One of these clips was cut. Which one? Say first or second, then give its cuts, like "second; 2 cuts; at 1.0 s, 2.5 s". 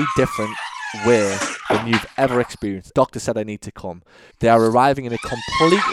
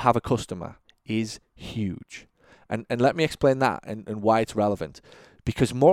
first; 2 cuts; at 2.9 s, 4.3 s